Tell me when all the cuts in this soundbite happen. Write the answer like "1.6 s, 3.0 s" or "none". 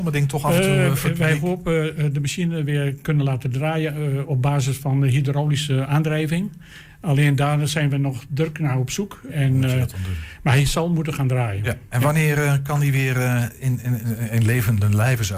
9.3 s